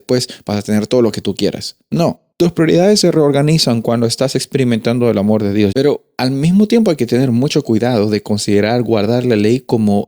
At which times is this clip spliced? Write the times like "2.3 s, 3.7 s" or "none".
2.3 s, 5.7 s